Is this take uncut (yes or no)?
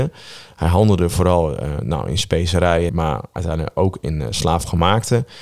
no